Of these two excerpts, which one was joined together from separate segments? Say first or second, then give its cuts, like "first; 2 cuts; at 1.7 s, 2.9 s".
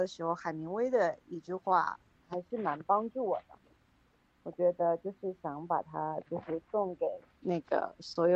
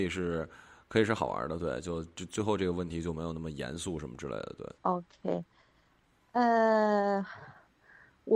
second; 1 cut; at 4.8 s